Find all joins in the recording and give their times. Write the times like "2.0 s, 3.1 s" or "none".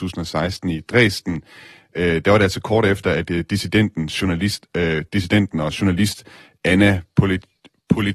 5.1 s